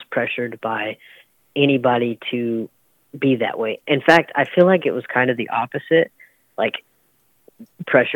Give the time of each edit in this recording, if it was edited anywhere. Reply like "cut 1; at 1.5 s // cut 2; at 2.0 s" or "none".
none